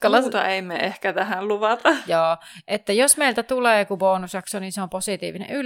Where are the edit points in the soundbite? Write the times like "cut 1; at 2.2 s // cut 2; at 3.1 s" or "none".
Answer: none